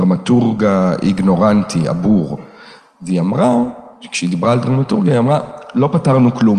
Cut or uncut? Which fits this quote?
uncut